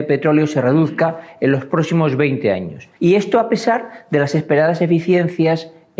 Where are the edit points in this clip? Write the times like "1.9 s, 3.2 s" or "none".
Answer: 3.0 s